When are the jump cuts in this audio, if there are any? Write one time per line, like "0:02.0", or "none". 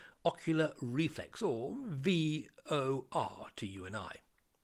none